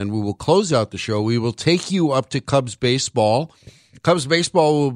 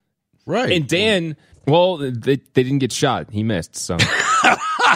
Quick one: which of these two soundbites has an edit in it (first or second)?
second